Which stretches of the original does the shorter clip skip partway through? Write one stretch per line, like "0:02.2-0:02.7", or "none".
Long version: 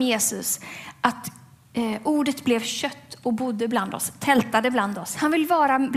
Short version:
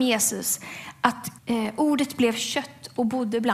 0:01.4-0:01.7